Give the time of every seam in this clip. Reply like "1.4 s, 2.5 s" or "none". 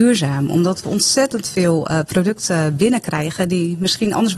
none